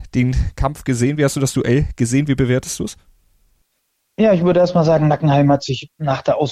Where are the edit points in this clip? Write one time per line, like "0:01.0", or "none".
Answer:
none

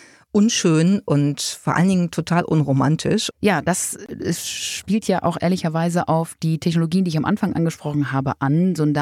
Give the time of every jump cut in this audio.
0:03.3

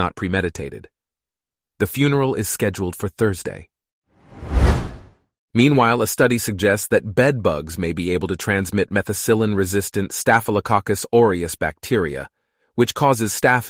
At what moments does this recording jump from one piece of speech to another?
0:01.6

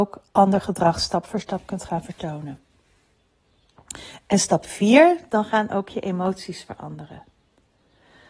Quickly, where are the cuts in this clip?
0:05.3

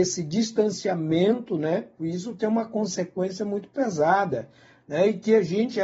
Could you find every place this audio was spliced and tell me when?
0:02.0

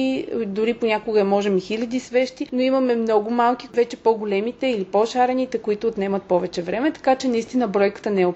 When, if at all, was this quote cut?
0:03.7

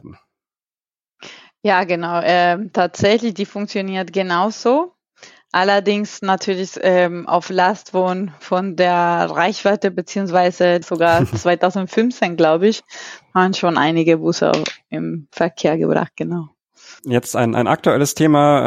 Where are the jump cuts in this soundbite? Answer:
0:10.8
0:17.0

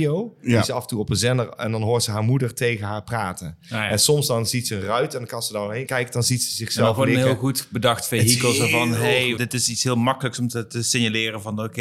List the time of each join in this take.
0:09.4

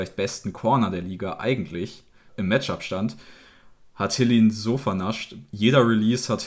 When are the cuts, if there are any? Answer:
0:02.3

